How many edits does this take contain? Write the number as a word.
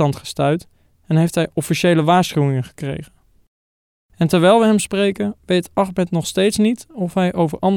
one